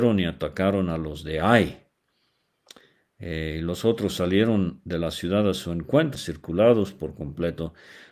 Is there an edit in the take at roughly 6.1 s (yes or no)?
yes